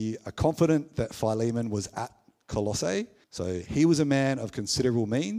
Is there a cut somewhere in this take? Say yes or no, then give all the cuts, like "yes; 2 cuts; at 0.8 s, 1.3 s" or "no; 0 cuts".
yes; 1 cut; at 3.2 s